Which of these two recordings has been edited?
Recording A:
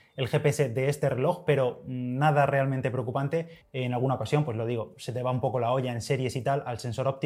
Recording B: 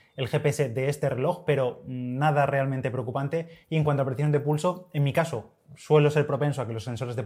A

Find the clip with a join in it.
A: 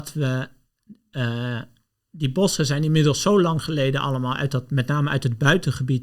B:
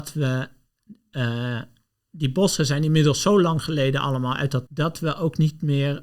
B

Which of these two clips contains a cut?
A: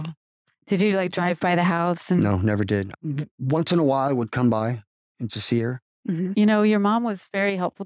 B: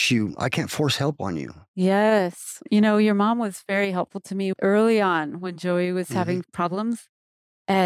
A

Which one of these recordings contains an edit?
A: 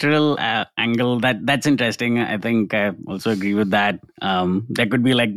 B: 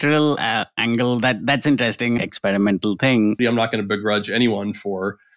B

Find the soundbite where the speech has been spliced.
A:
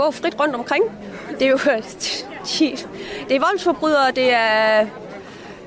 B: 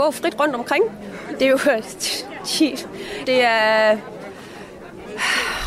B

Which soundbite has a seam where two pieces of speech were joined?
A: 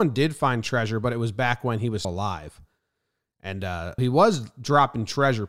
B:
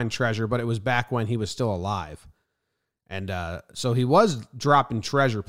A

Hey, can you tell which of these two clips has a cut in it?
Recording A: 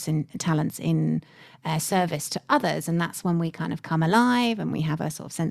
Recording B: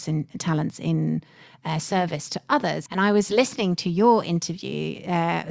B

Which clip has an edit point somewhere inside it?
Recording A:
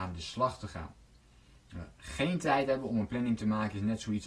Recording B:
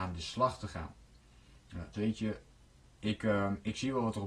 B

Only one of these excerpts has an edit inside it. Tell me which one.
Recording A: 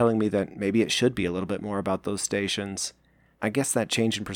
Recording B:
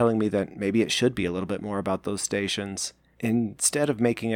B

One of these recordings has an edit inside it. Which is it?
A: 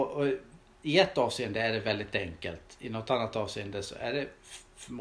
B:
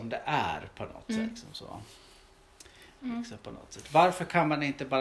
B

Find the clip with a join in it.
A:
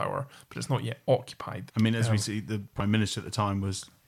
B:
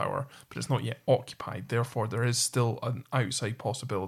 A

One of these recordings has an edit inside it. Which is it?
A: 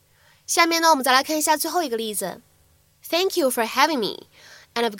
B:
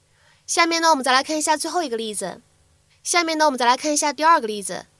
B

